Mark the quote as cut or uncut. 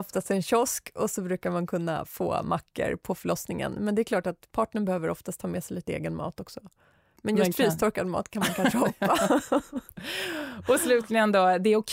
uncut